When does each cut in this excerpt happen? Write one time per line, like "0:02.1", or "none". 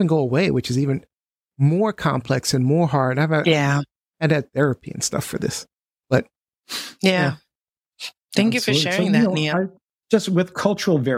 none